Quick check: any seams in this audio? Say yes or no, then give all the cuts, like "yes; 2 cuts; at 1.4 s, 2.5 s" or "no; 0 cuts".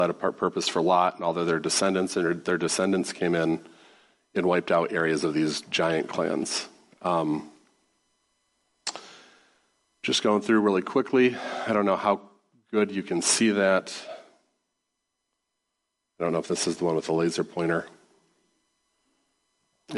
no; 0 cuts